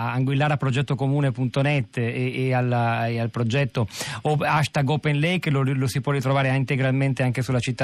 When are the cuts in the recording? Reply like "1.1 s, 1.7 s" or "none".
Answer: none